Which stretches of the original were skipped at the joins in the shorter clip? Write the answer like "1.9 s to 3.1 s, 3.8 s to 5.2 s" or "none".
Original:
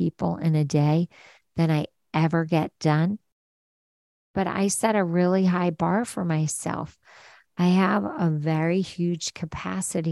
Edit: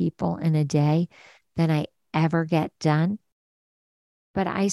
none